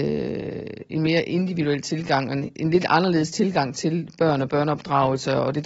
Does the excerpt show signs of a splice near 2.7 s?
no; 0 cuts

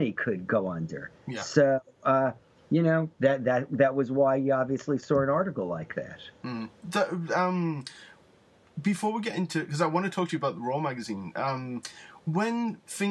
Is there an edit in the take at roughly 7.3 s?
no; 0 cuts

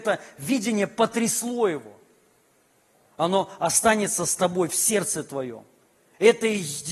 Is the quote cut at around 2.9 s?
yes; 1 cut; at 2.9 s

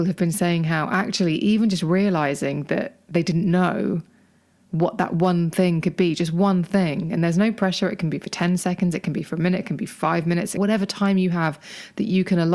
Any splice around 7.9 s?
no; 1 cut; at 10.6 s

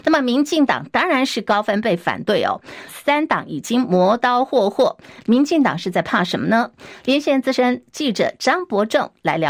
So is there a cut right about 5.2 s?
yes; 2 cuts; at 2.9 s, 5.2 s

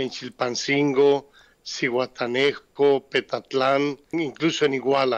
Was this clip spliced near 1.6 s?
no; 1 cut; at 4.1 s

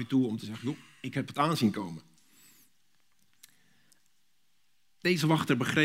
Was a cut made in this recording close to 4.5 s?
no; 0 cuts

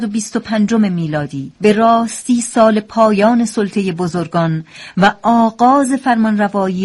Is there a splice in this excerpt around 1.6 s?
yes; 1 cut; at 1.6 s

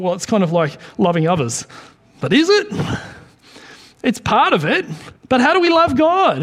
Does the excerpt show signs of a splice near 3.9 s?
no; 1 cut; at 5.2 s

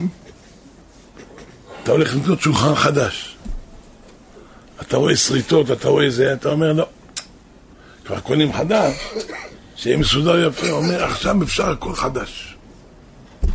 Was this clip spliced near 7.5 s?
no; 0 cuts

